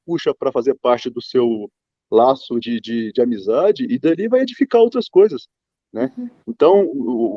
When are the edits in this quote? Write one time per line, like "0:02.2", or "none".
none